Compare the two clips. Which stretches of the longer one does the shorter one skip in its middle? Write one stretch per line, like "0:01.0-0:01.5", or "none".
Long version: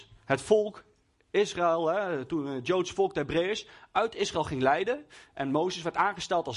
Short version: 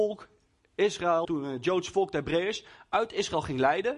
0:01.8-0:02.3